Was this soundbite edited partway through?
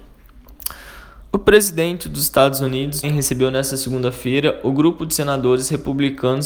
yes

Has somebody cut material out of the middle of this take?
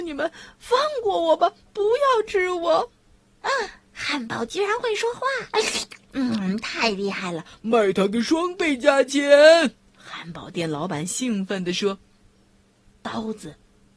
no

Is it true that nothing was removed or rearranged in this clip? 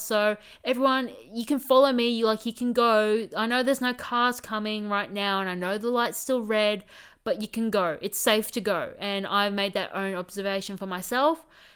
yes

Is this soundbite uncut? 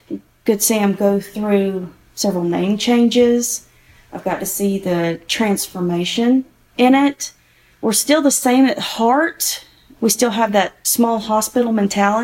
yes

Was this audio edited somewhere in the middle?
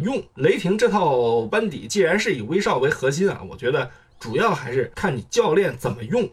no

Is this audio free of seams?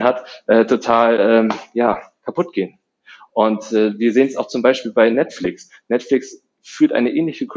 yes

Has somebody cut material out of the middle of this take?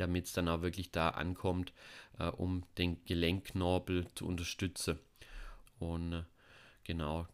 yes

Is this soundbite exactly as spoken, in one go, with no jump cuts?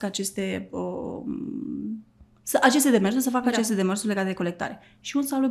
yes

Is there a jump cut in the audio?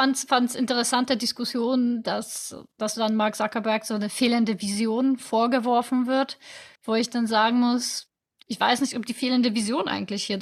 no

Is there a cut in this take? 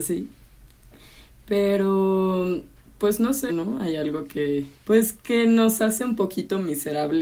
yes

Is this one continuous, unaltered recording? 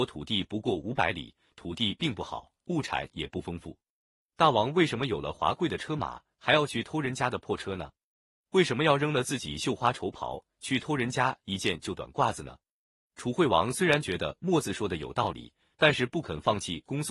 yes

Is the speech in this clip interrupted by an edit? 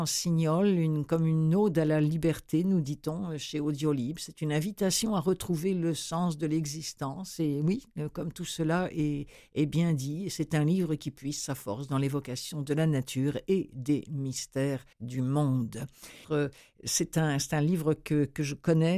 yes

